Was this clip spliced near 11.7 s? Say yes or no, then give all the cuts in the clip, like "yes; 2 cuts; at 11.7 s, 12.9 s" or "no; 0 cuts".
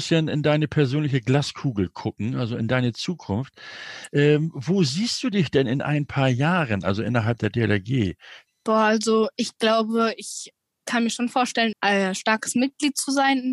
yes; 2 cuts; at 8.5 s, 11.7 s